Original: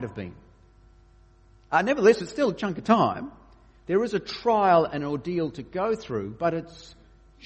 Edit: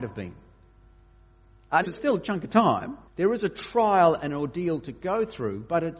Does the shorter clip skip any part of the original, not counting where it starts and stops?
yes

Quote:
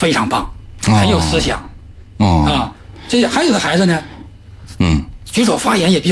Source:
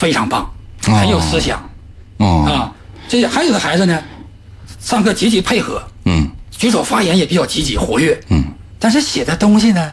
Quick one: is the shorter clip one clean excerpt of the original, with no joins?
no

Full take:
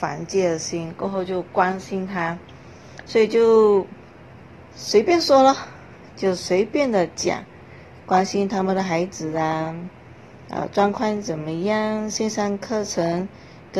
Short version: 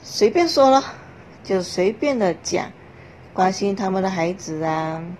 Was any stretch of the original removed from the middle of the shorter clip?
no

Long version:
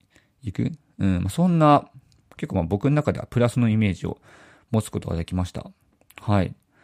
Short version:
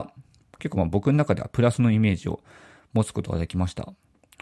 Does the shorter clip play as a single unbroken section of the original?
yes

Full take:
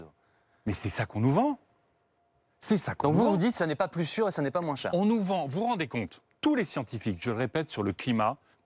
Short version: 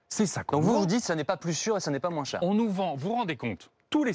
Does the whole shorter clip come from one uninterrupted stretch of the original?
yes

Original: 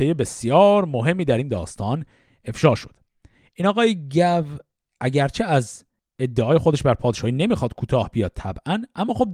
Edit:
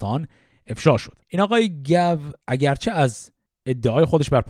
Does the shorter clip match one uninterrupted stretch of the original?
no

